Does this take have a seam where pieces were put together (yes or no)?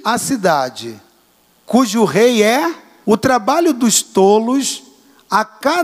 yes